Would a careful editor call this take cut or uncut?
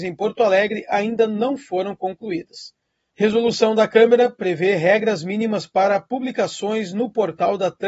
cut